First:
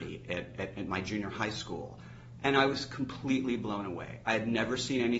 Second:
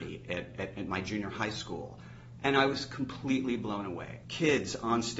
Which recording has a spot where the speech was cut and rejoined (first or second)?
second